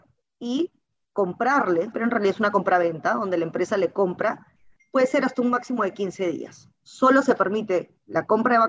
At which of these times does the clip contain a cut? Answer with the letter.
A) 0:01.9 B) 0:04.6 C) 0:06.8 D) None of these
A